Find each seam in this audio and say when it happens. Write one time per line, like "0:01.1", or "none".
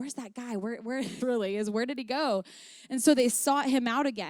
0:01.2